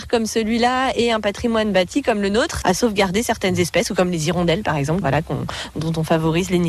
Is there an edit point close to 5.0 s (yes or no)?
yes